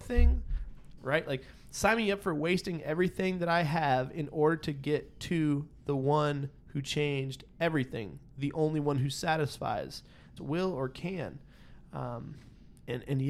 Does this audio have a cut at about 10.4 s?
yes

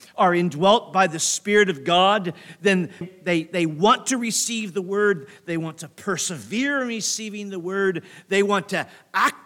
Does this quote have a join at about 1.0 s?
no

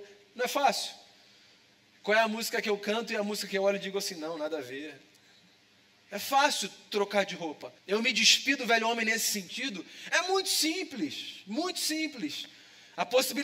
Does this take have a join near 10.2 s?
no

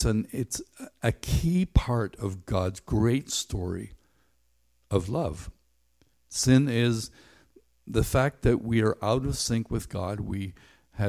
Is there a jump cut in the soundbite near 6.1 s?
yes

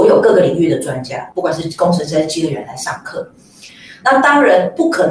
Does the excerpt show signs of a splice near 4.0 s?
no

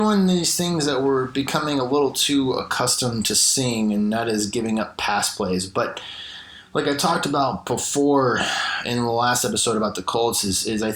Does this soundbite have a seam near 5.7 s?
no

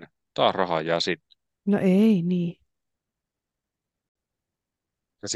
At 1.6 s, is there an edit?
yes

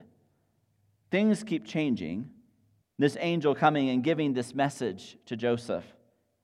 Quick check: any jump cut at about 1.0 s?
no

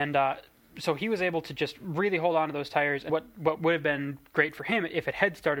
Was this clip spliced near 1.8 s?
no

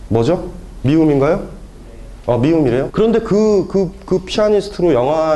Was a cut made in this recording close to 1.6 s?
no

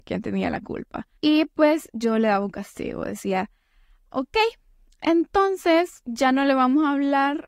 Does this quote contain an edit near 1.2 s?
yes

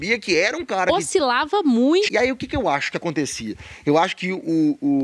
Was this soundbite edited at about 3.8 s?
no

